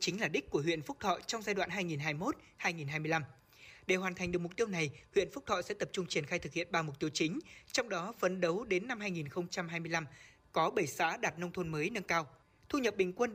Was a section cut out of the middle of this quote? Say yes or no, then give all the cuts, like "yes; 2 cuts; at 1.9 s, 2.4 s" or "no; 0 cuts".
no; 0 cuts